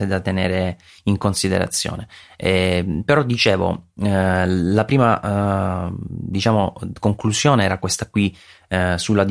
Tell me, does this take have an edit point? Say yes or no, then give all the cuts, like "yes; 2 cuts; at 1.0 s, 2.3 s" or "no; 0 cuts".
no; 0 cuts